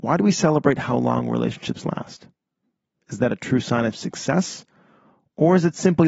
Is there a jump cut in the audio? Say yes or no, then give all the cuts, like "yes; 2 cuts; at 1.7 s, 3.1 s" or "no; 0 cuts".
no; 0 cuts